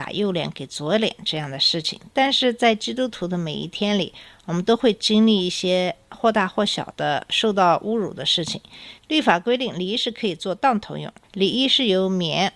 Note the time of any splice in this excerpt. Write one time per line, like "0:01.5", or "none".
0:09.0
0:11.2